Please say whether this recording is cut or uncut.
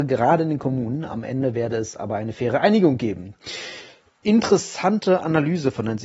uncut